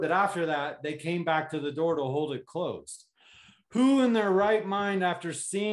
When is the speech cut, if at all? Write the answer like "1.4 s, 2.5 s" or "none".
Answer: none